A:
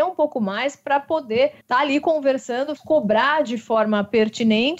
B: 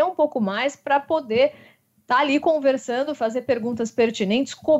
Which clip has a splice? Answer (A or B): A